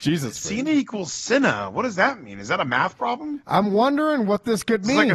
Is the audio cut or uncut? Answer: uncut